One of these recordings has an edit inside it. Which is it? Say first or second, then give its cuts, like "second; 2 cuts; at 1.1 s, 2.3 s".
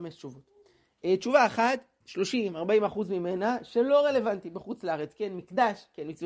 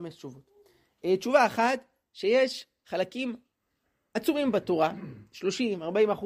first; 1 cut; at 2.0 s